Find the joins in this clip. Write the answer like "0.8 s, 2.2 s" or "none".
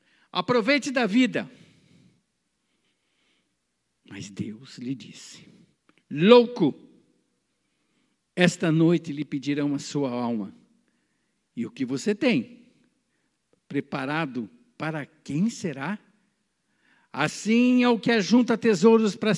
none